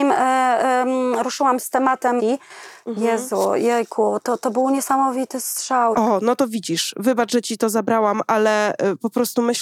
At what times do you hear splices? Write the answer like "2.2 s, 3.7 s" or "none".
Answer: 2.2 s, 5.9 s